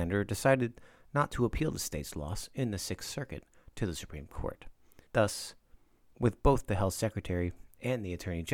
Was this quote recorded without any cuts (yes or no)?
no